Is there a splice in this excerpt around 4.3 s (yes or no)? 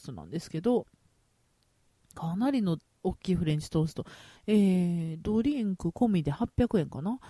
yes